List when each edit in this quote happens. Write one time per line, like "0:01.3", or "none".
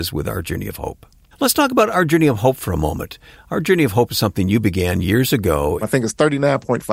0:01.3
0:05.8